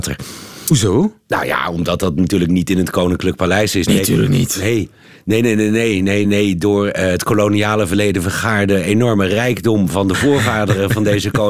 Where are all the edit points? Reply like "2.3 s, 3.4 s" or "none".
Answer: none